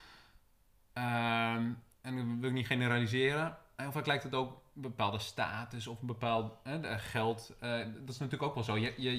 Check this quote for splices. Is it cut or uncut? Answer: cut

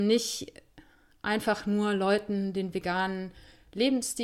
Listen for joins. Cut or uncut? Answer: uncut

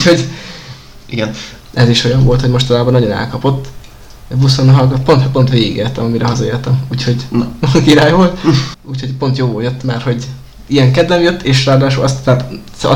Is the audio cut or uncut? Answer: cut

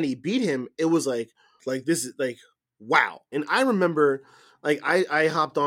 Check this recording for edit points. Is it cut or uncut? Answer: cut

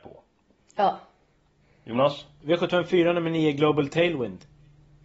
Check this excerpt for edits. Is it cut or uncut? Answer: cut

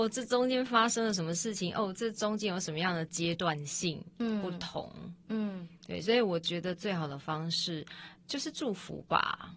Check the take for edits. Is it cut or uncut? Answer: uncut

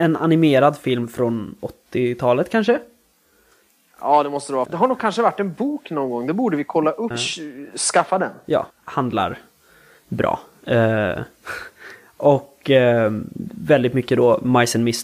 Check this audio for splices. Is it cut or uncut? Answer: cut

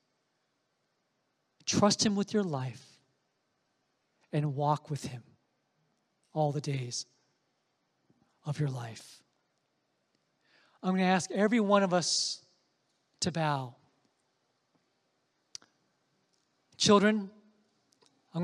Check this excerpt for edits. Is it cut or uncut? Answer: uncut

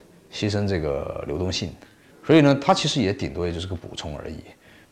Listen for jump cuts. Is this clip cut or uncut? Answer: uncut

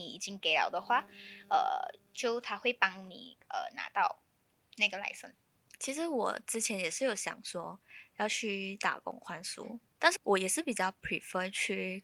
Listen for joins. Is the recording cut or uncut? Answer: cut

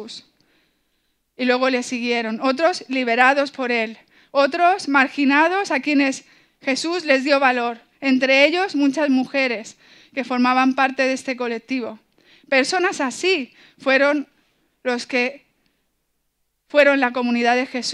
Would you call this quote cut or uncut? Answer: uncut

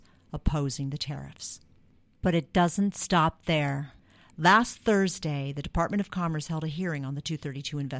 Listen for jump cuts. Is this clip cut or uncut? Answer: uncut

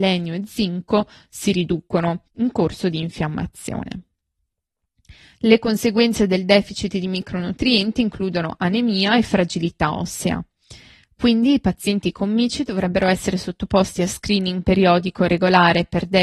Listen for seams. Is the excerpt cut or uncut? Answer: cut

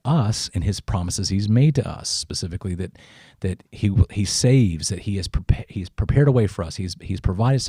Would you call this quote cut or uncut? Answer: uncut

